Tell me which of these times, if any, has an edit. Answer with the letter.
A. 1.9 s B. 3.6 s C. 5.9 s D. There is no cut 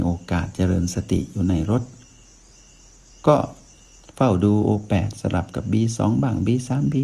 D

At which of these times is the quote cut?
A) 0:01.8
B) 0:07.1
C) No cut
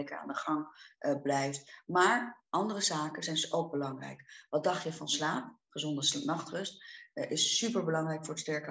C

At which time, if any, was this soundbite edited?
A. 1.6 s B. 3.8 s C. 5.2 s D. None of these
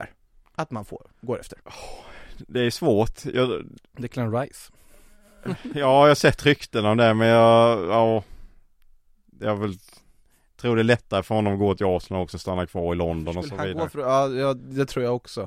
A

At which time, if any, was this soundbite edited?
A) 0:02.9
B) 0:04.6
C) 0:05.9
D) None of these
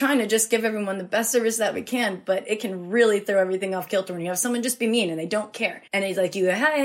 C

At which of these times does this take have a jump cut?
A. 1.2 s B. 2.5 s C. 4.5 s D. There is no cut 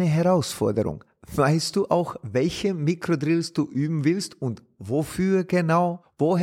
D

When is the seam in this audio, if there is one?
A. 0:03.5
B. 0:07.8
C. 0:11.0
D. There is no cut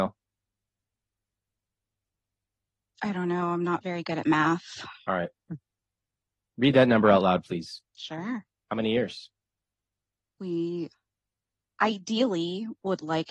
B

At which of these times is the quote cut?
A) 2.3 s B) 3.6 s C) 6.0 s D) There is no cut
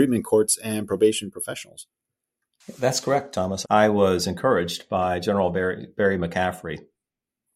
B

